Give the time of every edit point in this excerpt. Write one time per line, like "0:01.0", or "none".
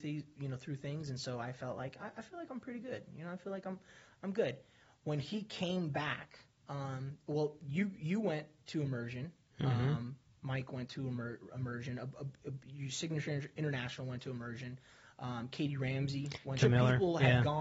0:16.6